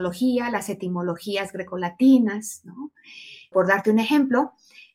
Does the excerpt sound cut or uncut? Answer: cut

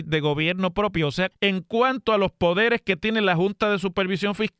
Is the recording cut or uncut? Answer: cut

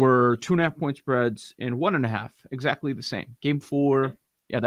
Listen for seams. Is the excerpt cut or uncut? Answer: uncut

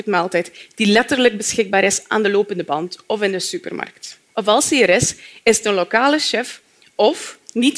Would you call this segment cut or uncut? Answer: cut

